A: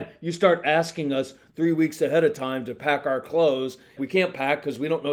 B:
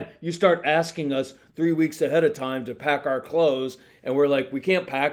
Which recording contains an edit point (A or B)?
A